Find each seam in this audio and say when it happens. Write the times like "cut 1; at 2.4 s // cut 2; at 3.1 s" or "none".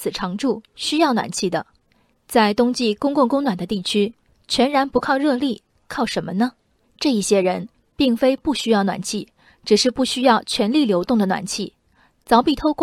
cut 1; at 6.8 s